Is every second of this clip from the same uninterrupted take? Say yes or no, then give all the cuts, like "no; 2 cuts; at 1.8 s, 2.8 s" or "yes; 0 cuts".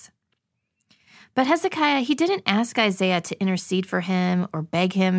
yes; 0 cuts